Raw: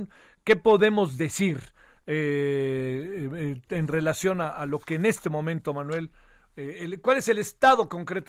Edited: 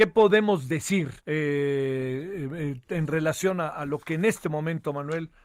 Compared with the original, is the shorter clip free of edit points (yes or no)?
no